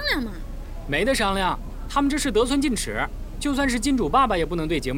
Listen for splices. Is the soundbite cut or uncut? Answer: uncut